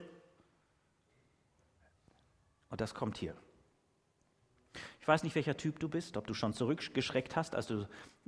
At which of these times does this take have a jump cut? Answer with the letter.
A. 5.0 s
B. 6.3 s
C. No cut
C